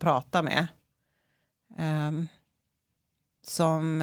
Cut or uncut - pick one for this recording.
uncut